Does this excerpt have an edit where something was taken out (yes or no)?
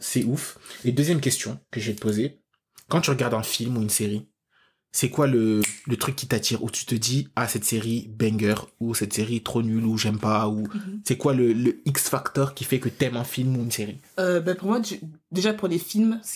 no